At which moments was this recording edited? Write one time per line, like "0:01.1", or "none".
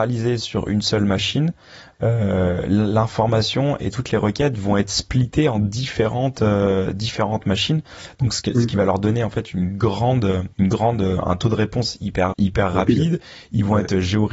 0:10.5
0:12.3